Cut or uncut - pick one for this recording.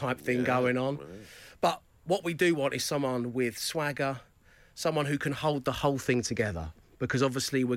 uncut